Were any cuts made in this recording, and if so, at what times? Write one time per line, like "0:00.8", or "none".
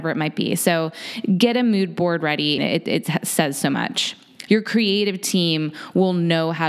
0:02.6
0:04.5